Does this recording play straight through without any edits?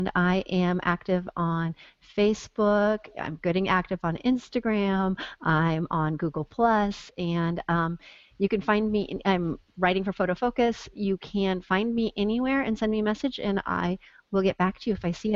yes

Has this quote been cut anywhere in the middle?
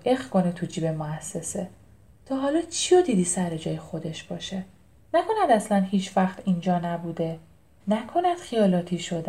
yes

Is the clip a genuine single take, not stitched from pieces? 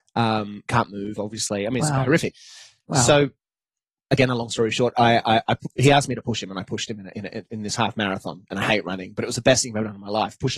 yes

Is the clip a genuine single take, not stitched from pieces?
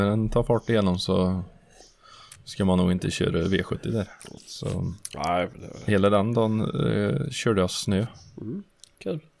no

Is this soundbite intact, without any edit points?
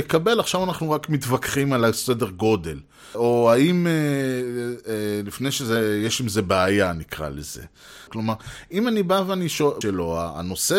no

